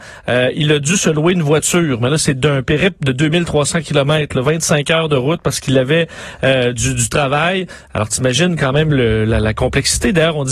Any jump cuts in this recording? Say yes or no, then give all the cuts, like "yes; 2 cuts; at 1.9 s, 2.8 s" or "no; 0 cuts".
no; 0 cuts